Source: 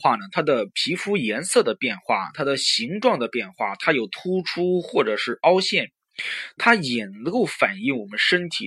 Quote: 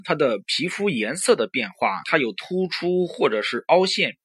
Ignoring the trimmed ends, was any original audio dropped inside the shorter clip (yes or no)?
yes